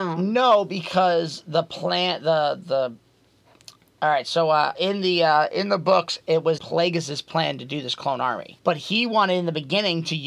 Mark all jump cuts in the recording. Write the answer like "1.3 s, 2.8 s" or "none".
4.7 s, 6.6 s, 8.6 s